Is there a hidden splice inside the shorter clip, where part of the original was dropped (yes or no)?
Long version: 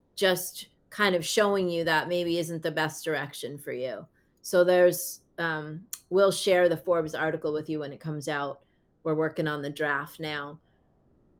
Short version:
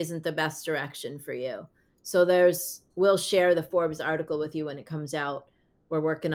yes